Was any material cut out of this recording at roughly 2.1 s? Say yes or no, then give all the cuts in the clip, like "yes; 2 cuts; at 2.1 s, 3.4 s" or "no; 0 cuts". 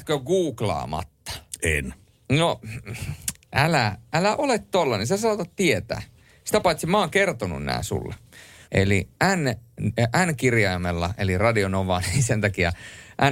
no; 1 cut; at 8.6 s